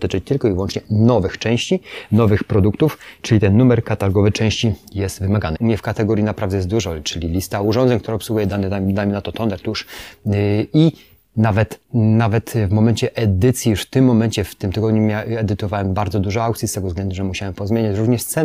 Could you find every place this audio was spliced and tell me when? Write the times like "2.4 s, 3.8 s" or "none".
5.5 s